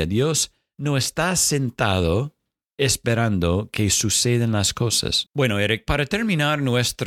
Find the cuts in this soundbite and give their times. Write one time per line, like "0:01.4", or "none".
0:05.3